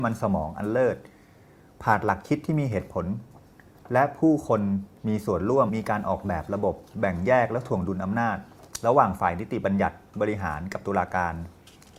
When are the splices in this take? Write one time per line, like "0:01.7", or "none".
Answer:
0:05.7

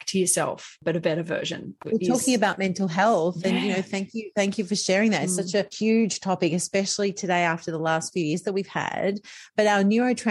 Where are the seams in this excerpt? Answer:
none

